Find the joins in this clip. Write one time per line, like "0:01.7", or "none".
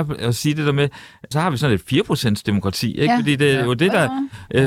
0:01.3